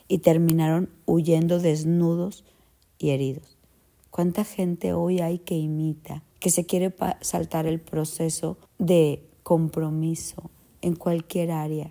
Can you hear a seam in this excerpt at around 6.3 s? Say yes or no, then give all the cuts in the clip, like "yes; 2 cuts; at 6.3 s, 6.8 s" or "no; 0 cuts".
yes; 3 cuts; at 4.0 s, 6.3 s, 8.7 s